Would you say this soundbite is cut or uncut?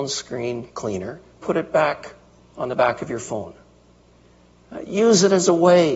cut